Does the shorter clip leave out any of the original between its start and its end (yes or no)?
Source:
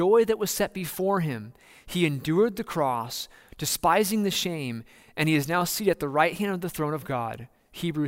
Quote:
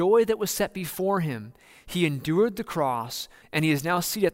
yes